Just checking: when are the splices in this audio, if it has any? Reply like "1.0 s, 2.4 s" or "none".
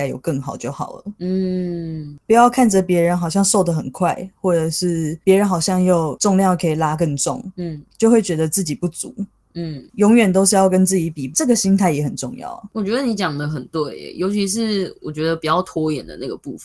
none